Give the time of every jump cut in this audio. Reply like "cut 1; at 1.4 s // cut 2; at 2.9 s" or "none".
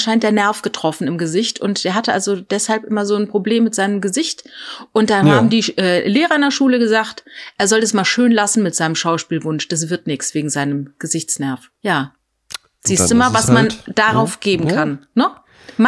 cut 1; at 11.8 s